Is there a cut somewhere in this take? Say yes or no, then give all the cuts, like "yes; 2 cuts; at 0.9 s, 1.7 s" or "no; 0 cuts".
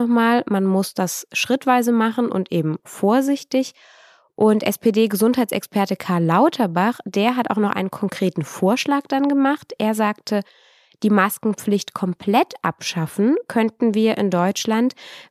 no; 0 cuts